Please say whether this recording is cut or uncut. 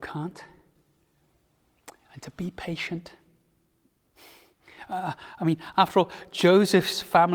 uncut